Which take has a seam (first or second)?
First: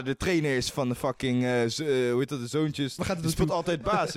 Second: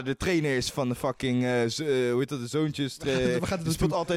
first